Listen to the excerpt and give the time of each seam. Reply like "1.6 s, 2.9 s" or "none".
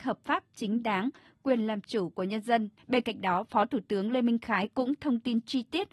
2.8 s

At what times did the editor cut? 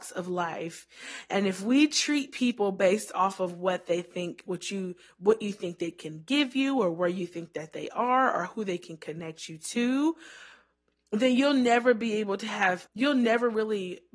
12.9 s

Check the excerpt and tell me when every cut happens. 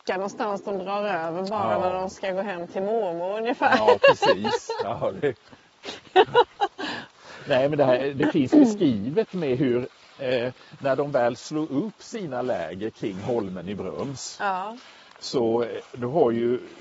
none

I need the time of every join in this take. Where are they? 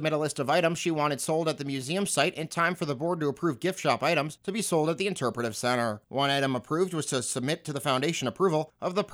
none

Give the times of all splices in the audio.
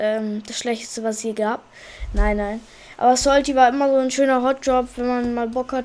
none

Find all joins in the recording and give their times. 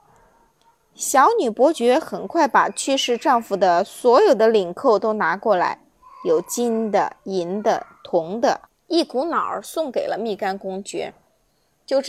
8.7 s

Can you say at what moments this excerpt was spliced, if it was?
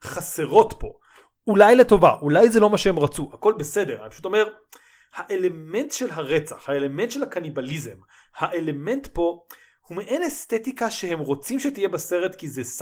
none

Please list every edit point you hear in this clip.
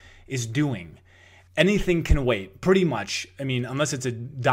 1.5 s

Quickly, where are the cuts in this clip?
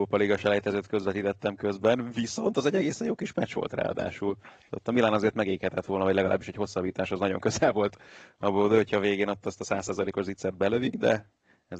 none

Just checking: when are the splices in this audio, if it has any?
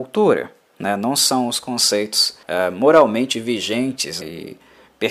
2.4 s, 4.2 s

